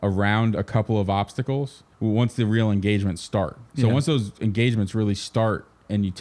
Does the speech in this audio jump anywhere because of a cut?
yes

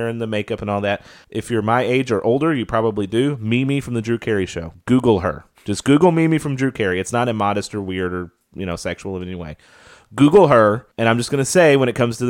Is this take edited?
yes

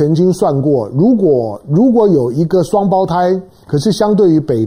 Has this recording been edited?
yes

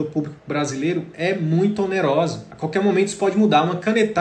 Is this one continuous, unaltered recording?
yes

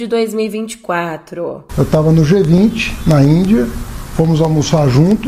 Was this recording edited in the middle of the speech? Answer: yes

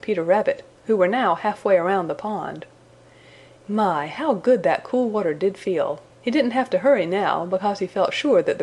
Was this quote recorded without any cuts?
no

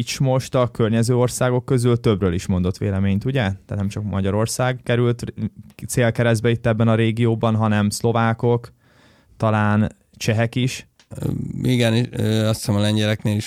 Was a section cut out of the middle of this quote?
no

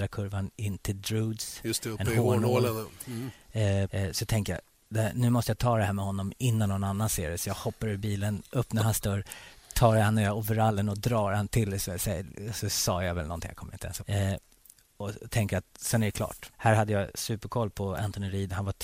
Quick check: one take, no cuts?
no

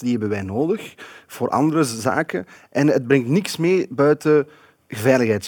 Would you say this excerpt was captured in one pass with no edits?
yes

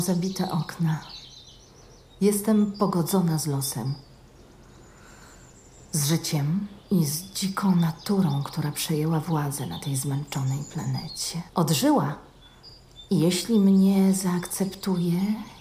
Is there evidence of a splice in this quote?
yes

